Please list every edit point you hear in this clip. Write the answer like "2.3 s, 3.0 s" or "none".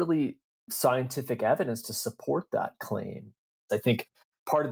3.7 s